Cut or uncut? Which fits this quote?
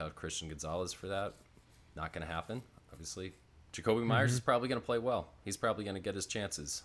cut